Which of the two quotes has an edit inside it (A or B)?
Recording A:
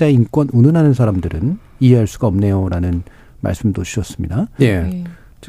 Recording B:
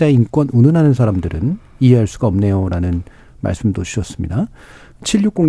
A